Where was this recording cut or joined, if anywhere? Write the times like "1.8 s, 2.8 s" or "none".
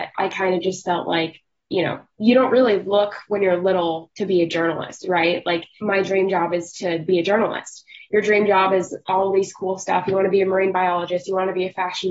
5.8 s